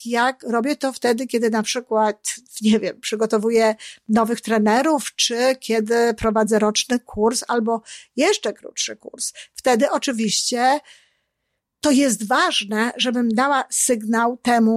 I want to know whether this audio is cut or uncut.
uncut